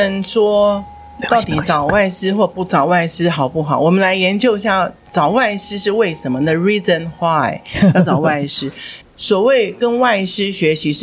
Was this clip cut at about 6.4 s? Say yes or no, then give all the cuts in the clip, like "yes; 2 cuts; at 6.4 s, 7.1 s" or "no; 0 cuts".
no; 1 cut; at 9.0 s